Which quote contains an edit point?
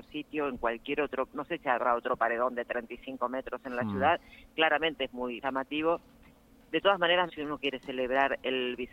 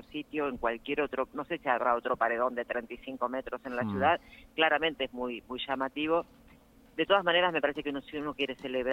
first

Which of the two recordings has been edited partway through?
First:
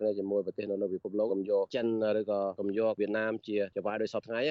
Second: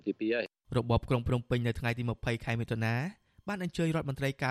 first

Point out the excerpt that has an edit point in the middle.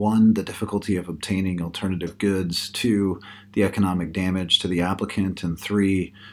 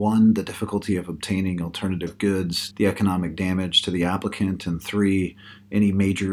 second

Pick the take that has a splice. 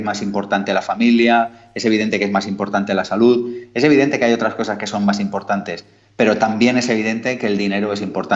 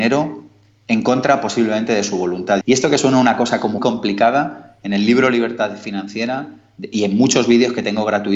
second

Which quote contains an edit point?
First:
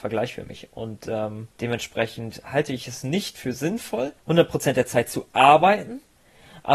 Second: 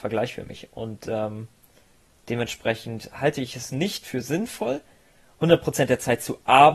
first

